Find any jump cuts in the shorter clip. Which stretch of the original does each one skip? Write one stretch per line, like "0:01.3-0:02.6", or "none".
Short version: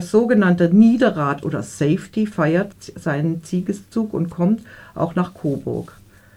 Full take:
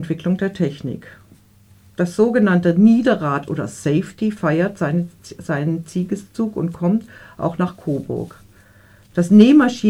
0:04.8-0:05.1